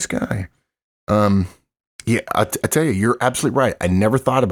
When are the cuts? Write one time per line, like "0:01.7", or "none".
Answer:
none

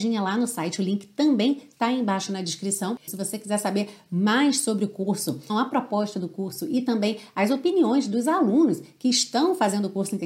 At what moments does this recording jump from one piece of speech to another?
0:03.1
0:05.5

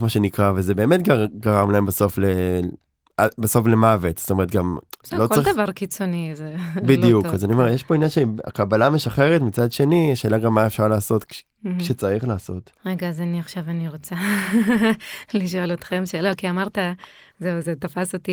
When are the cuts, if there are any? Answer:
0:12.8

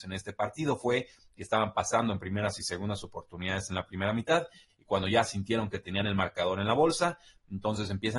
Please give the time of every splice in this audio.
none

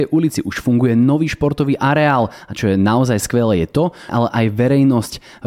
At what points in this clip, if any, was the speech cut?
0:04.1

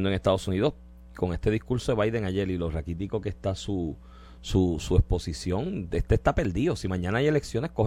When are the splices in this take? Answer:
none

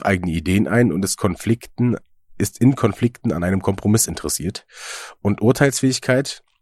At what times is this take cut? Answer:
none

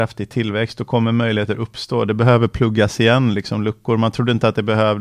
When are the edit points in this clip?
none

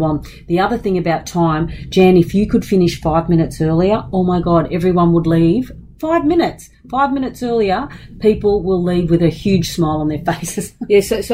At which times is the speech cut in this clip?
none

